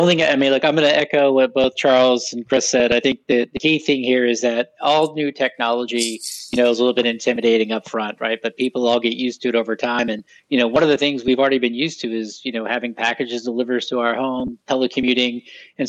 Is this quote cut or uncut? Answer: uncut